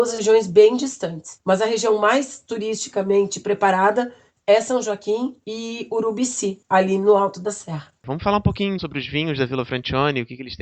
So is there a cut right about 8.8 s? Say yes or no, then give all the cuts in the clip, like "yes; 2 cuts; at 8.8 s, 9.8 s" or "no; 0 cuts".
yes; 1 cut; at 8.8 s